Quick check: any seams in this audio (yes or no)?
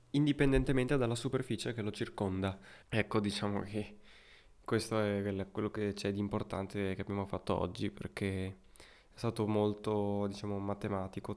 yes